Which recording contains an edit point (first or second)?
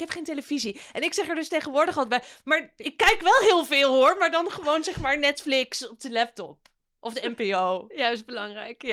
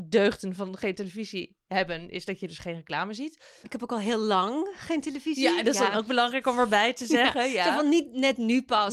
second